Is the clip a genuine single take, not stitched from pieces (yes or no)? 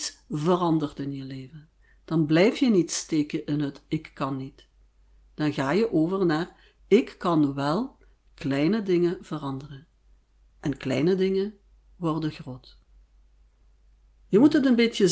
yes